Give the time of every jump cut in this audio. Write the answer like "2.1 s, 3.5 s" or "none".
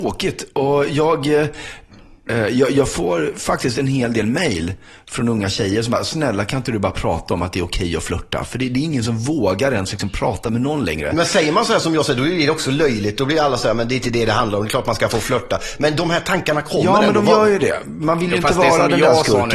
none